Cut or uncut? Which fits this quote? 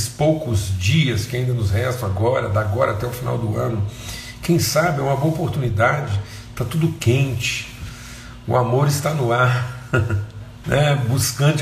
cut